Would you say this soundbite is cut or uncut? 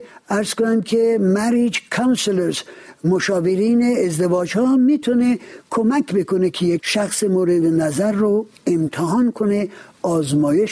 cut